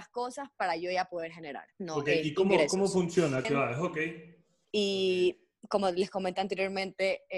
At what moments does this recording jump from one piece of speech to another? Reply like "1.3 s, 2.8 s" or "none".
1.7 s, 3.4 s